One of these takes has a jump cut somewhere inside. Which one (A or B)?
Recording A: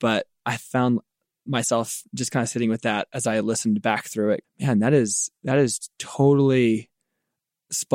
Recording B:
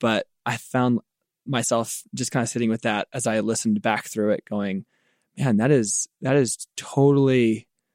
A